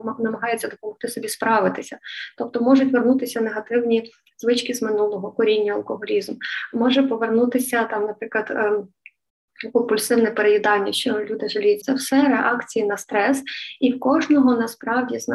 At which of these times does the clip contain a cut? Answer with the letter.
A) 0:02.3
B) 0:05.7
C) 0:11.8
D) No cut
C